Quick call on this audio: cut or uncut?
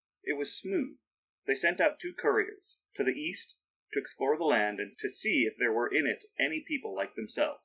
cut